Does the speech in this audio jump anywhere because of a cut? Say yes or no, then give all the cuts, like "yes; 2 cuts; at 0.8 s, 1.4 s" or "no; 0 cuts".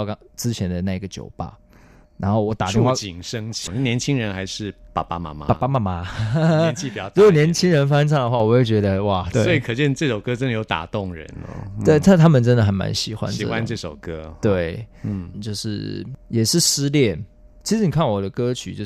yes; 3 cuts; at 3.7 s, 9.3 s, 15.3 s